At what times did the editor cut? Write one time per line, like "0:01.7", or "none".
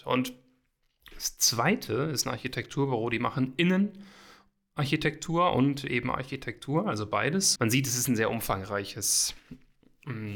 0:07.6